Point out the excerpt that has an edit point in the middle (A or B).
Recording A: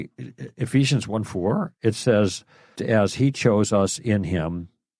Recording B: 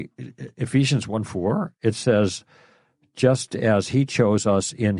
A